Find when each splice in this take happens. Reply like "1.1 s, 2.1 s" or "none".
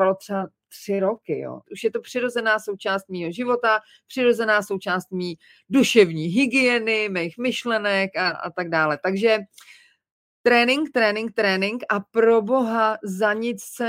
1.6 s